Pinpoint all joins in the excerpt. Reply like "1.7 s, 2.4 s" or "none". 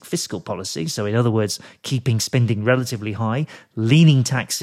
none

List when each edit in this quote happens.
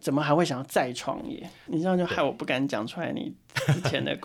1.7 s

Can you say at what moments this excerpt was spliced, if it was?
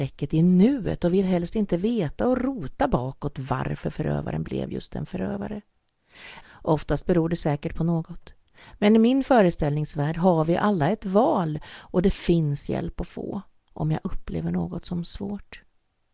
6.4 s

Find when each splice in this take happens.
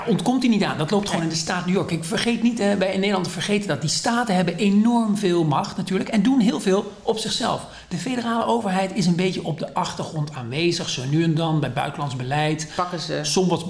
none

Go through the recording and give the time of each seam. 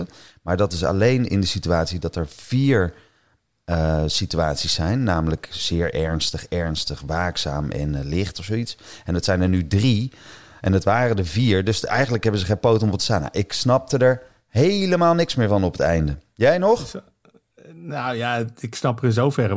none

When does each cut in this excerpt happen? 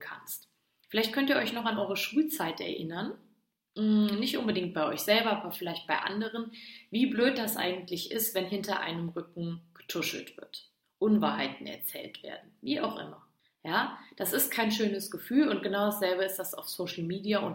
10.8 s

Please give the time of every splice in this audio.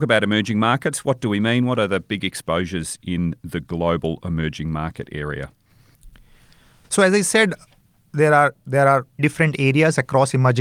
6.8 s, 9.2 s

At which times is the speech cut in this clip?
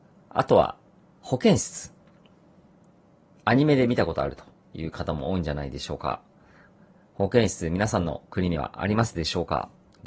none

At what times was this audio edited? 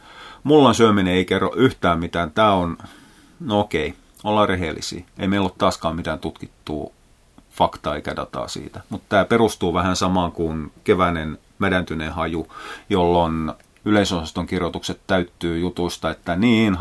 none

